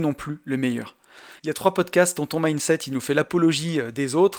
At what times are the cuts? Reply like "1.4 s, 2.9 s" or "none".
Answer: 1.4 s